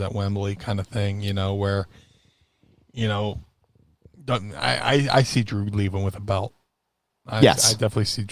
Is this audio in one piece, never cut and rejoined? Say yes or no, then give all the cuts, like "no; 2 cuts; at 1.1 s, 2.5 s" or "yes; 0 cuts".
yes; 0 cuts